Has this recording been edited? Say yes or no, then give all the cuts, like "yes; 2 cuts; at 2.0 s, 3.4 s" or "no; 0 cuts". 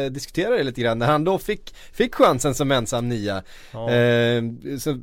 no; 0 cuts